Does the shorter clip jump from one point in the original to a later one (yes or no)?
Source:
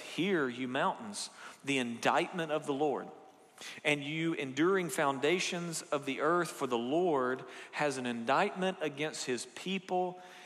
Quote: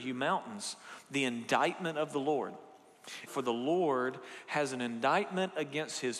yes